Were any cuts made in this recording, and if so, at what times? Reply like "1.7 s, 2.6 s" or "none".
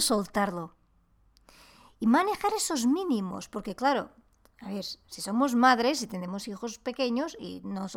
none